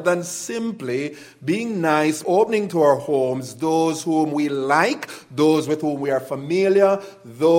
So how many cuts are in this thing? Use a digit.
1